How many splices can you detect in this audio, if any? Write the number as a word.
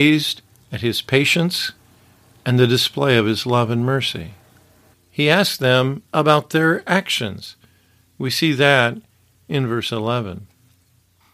one